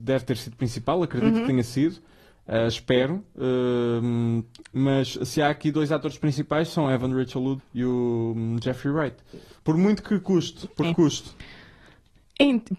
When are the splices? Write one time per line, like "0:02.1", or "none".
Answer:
0:07.6
0:10.8